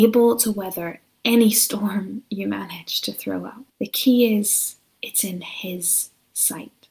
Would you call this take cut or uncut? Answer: cut